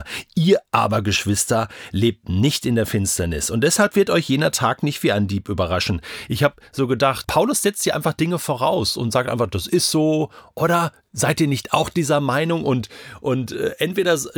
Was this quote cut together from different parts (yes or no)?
yes